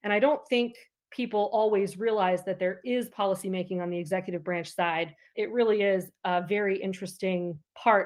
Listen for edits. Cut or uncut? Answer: cut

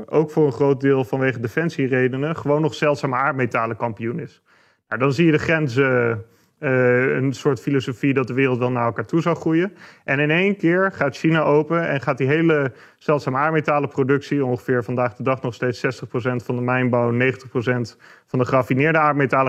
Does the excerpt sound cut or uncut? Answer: cut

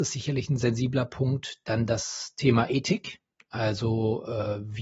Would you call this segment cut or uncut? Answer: uncut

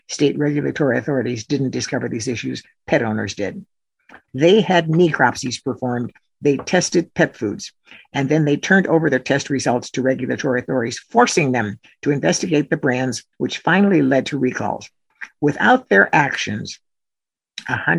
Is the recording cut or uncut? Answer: cut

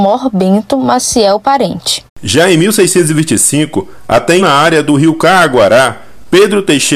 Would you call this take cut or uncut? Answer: cut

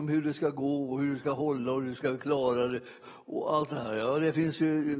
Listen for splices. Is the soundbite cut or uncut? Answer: cut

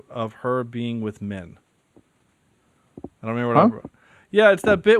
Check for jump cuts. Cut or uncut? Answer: uncut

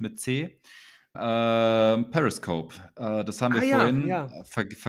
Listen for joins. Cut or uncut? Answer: cut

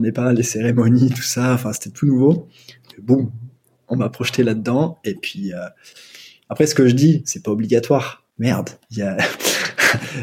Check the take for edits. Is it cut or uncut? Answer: cut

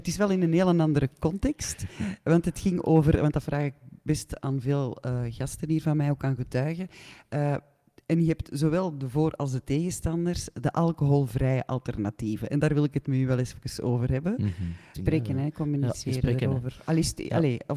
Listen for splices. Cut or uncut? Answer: cut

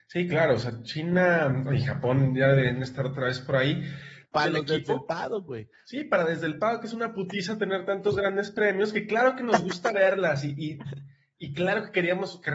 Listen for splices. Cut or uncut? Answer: cut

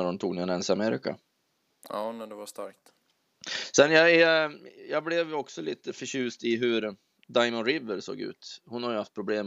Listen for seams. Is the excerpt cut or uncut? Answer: uncut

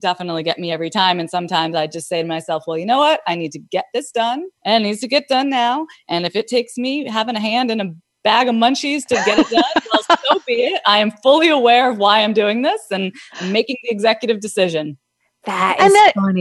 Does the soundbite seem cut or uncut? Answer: cut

